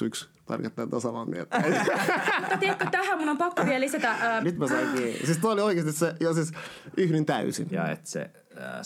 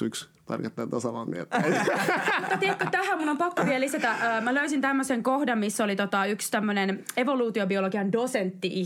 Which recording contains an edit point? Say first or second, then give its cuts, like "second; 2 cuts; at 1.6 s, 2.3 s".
first; 2 cuts; at 4.4 s, 7.7 s